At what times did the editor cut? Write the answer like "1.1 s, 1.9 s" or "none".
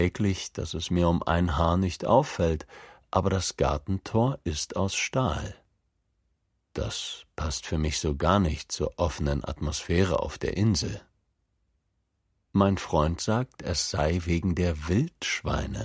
none